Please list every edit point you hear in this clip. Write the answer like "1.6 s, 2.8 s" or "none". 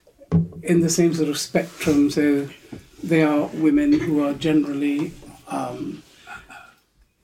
none